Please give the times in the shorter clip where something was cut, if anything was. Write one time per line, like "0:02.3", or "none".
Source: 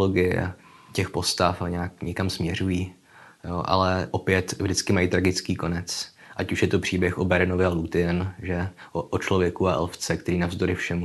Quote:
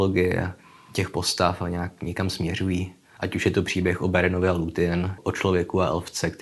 0:03.2
0:05.2